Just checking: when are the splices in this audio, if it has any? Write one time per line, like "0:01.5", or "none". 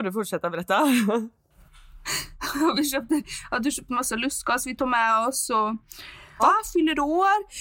0:06.4